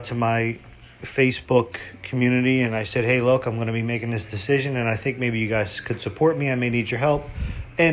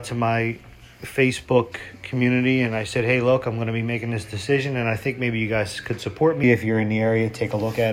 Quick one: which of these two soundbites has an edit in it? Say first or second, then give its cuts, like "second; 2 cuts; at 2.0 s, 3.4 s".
second; 1 cut; at 6.4 s